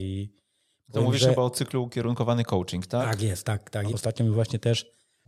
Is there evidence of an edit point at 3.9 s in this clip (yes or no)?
yes